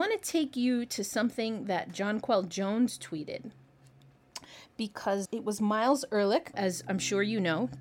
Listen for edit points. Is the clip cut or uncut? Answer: cut